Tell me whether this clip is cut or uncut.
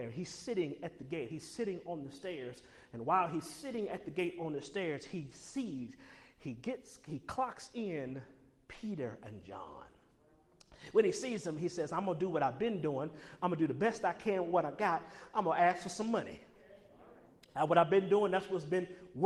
uncut